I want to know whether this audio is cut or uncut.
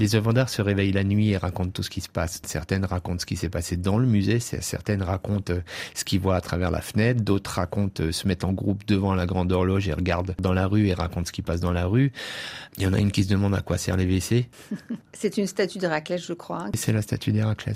uncut